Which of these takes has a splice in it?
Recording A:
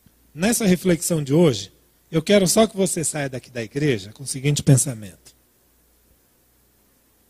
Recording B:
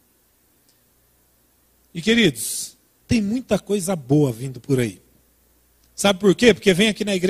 B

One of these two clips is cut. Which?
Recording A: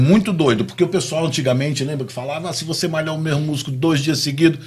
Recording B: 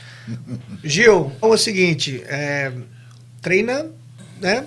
B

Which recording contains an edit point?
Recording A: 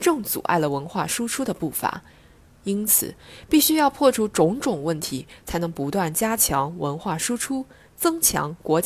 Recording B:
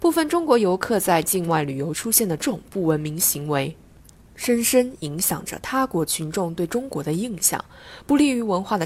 B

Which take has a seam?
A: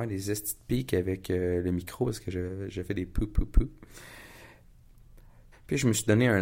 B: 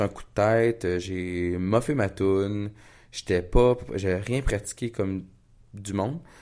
A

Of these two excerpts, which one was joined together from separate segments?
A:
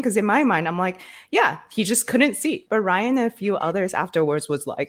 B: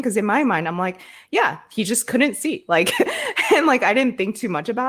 A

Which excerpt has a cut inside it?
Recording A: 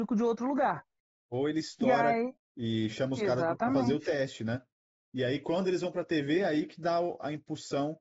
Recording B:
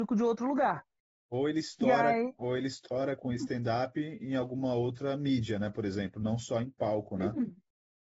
A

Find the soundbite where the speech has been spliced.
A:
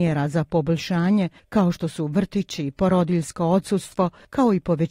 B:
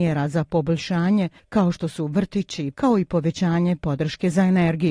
B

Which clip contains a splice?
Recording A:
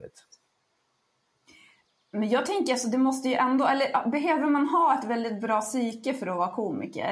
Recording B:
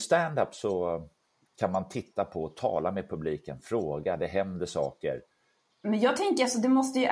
B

